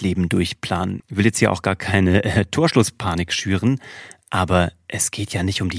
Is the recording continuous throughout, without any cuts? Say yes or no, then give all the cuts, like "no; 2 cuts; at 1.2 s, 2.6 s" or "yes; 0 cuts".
no; 1 cut; at 1.0 s